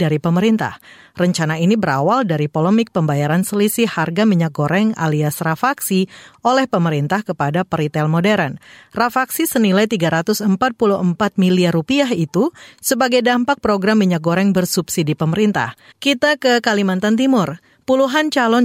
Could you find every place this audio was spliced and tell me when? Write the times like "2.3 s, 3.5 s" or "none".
15.9 s